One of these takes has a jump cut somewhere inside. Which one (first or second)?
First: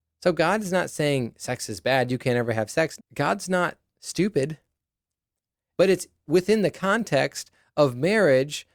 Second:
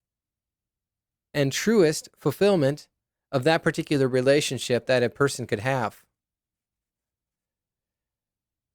first